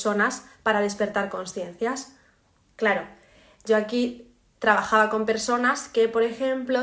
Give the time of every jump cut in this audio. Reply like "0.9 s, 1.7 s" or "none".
2.6 s

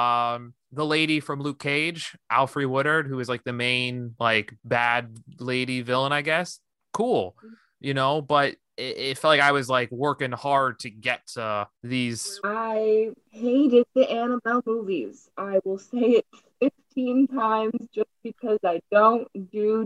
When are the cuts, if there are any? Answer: none

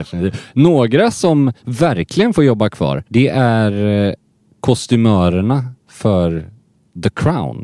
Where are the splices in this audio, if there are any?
3.1 s

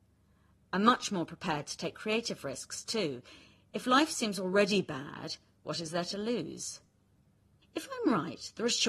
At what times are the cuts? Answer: 7.6 s

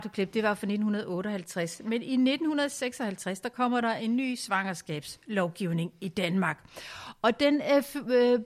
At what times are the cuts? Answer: none

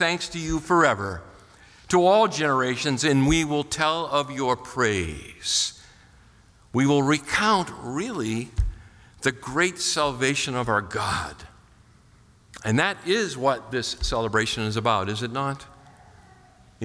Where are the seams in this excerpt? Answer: none

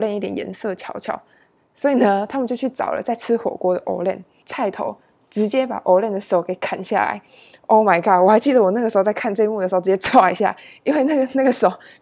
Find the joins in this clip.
4.4 s

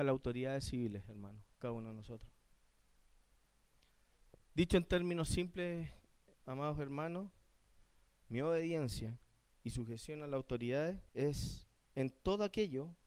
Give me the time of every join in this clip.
8.2 s, 11.1 s

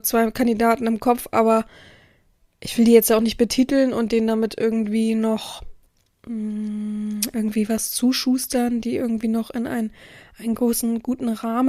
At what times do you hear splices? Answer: none

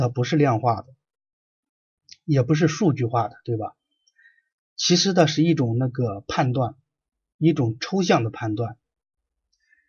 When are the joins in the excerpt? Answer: none

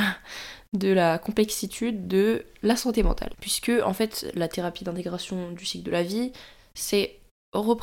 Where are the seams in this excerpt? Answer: 3.3 s

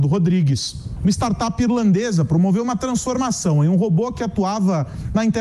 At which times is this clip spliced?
1.0 s

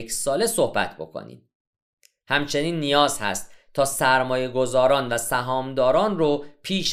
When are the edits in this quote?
none

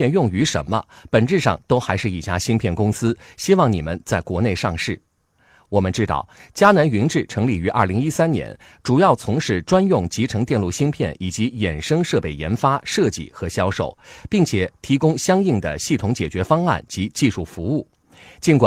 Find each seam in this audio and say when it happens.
none

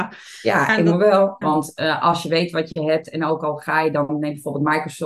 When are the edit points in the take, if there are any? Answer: 1.4 s

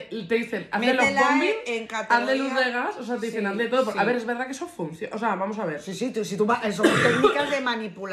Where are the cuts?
none

